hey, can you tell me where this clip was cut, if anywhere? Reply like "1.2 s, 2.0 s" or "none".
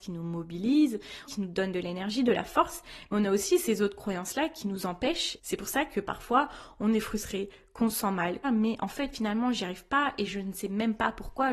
1.3 s, 5.4 s, 8.4 s